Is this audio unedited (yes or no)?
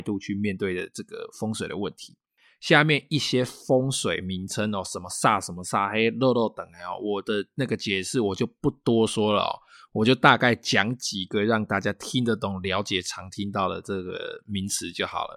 yes